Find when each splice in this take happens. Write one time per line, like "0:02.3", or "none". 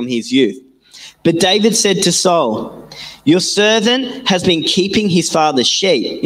none